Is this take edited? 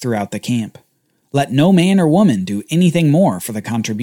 no; 0 cuts

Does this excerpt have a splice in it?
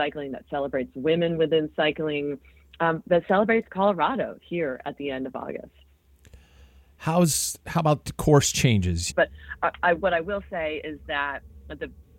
yes; 1 cut; at 9.1 s

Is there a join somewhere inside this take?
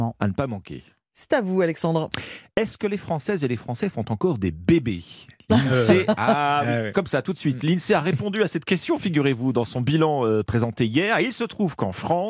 no; 0 cuts

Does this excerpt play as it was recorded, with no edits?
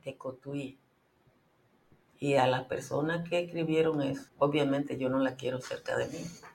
no; 2 cuts; at 2.1 s, 4.3 s

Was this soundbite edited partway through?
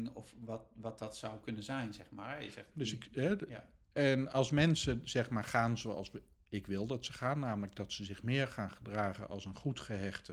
yes; 1 cut; at 2.7 s

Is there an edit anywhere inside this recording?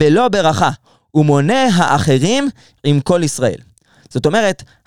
no; 0 cuts

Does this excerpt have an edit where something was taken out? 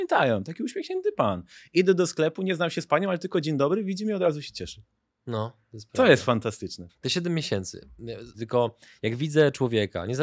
yes; 2 cuts; at 6.9 s, 8.3 s

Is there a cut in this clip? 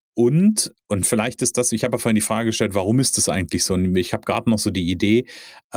no; 0 cuts

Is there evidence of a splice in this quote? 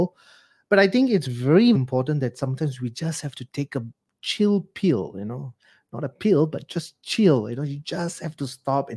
yes; 1 cut; at 1.7 s

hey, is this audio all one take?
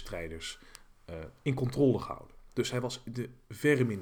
yes; 0 cuts

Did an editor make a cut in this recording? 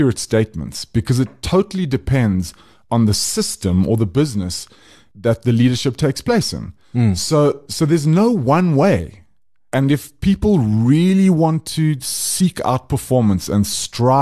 yes; 1 cut; at 6.8 s

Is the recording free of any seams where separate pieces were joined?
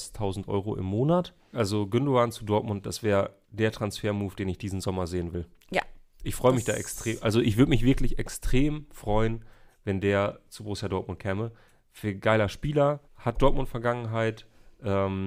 no; 3 cuts; at 1.5 s, 3.4 s, 13.0 s

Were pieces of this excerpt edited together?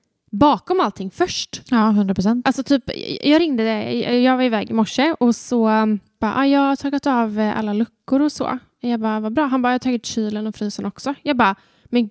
no; 0 cuts

